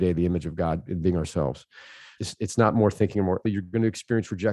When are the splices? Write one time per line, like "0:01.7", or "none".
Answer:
0:02.2
0:03.4